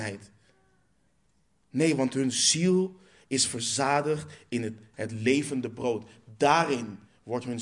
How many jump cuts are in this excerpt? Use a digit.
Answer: 1